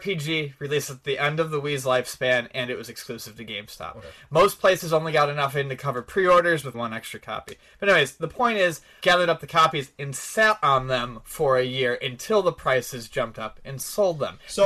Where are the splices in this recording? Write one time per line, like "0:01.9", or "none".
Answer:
0:06.7
0:09.0